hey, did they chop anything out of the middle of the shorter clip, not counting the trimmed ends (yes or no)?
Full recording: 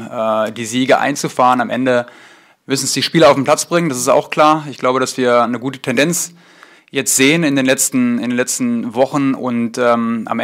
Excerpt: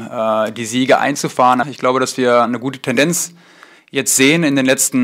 yes